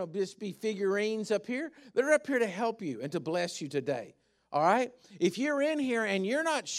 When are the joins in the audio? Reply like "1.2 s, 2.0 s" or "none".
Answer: none

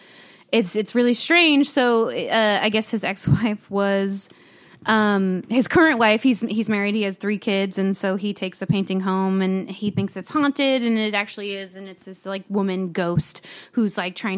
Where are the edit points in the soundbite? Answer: none

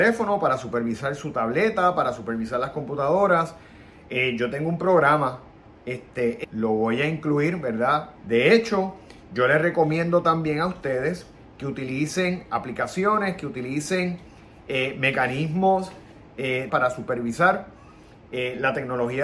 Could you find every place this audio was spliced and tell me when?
6.4 s, 8.2 s, 16.7 s

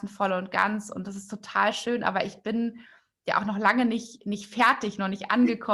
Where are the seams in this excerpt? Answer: none

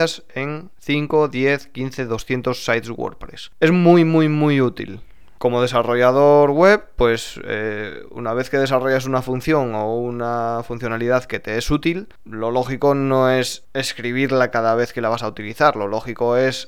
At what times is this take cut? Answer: 5.4 s

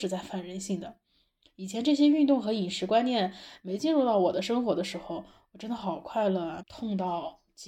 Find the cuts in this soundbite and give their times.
6.6 s

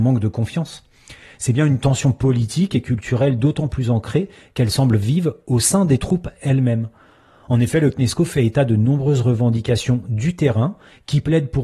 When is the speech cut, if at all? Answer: none

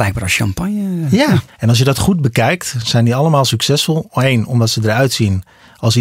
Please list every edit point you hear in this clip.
1.5 s

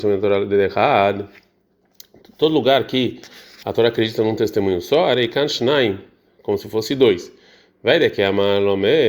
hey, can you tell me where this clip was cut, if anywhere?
none

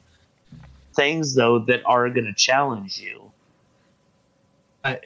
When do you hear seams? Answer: 0.9 s

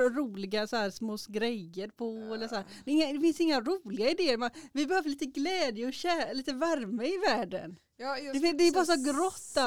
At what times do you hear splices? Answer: none

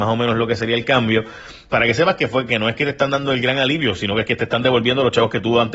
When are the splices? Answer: 1.7 s

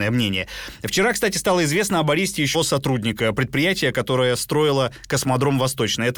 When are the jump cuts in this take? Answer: 2.5 s

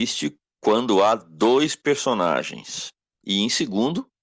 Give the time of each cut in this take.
3.2 s

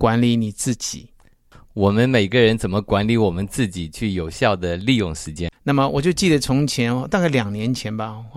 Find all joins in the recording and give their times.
5.5 s

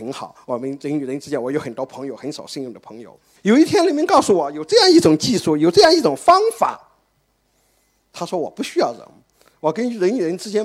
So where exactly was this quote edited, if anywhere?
3.4 s

